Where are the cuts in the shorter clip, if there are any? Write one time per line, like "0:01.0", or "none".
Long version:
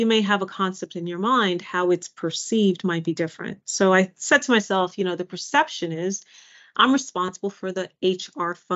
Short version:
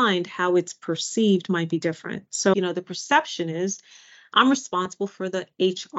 0:02.5